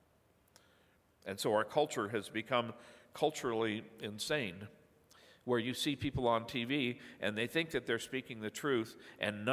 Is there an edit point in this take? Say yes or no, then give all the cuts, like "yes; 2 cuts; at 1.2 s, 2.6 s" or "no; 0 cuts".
no; 0 cuts